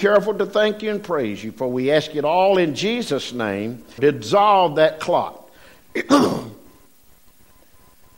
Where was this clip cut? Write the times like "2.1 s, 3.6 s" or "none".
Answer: 4.0 s